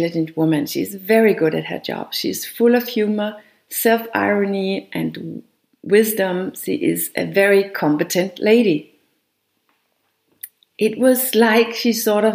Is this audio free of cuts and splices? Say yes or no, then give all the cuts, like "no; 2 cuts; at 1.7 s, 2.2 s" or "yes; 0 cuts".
no; 1 cut; at 10.7 s